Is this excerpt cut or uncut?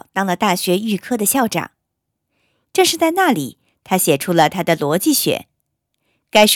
cut